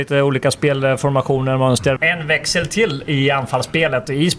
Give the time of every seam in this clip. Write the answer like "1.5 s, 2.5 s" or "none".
2.0 s

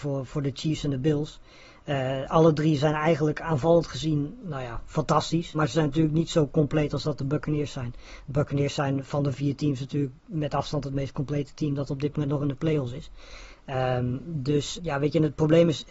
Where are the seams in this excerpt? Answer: 5.5 s, 14.8 s

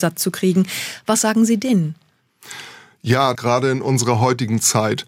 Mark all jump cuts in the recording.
3.3 s

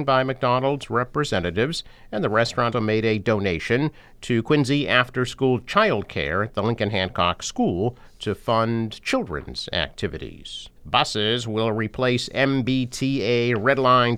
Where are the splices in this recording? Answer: 2.7 s, 10.8 s

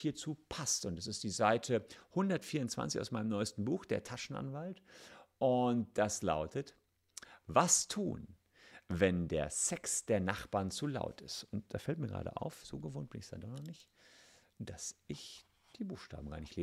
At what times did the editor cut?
none

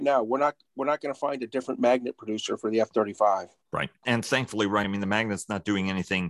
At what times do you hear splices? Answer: none

